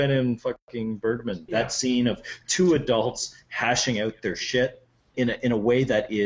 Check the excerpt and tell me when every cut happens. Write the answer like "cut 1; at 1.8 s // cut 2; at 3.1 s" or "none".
cut 1; at 1.5 s // cut 2; at 5.1 s